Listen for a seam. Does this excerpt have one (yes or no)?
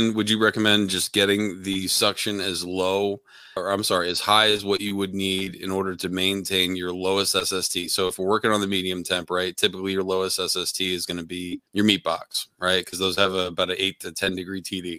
yes